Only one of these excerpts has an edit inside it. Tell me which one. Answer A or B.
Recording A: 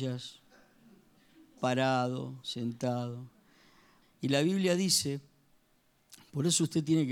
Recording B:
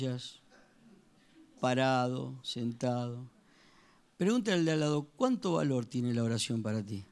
A